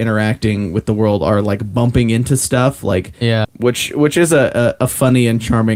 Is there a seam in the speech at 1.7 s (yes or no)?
no